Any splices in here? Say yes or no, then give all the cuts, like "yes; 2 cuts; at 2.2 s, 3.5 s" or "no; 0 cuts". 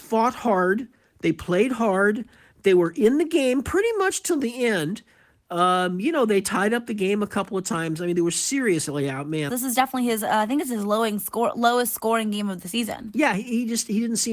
yes; 1 cut; at 9.5 s